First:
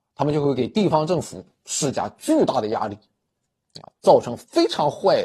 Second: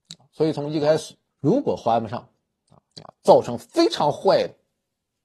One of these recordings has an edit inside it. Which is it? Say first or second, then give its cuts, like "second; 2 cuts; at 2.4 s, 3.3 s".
second; 2 cuts; at 1.3 s, 2.9 s